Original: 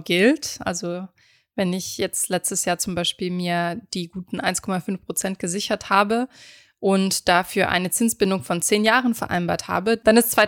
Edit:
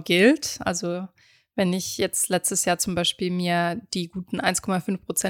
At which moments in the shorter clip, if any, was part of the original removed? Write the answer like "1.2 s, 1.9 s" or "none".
none